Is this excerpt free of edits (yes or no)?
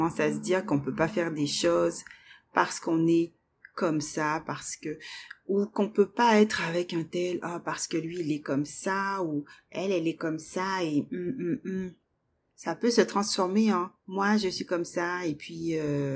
no